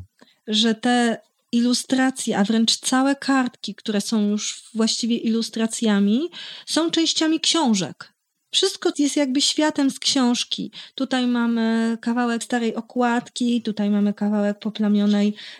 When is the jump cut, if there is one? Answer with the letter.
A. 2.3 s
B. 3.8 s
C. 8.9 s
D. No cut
C